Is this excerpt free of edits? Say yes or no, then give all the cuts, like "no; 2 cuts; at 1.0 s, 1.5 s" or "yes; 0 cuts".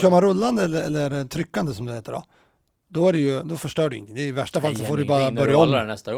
yes; 0 cuts